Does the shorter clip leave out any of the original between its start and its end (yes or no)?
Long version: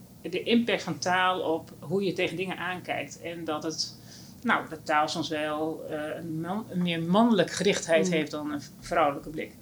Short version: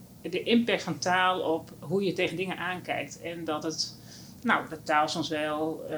no